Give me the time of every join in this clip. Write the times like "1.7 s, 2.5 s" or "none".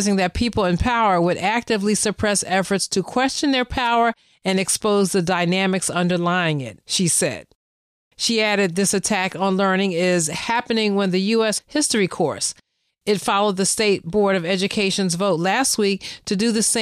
6.8 s, 11.6 s